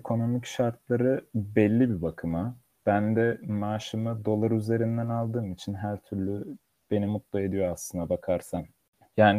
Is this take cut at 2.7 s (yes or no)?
no